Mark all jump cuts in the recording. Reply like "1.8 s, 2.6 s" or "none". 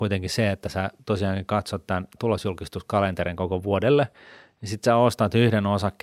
2.2 s